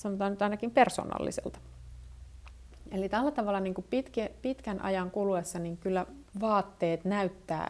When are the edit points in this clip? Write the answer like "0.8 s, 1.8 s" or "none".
6.3 s